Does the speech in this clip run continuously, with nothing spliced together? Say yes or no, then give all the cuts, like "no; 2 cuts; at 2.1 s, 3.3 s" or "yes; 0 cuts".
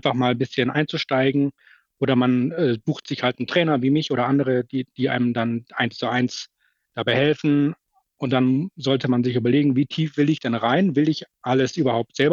yes; 0 cuts